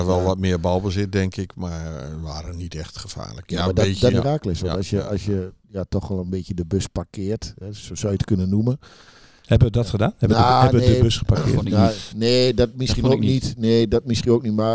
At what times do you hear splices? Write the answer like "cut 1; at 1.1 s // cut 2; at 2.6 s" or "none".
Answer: cut 1; at 4.1 s